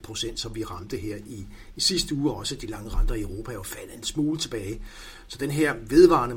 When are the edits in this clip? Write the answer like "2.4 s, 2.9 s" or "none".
none